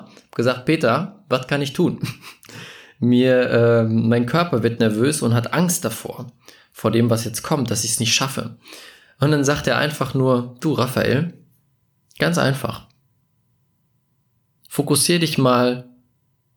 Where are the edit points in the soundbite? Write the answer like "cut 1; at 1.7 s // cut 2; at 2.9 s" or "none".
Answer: none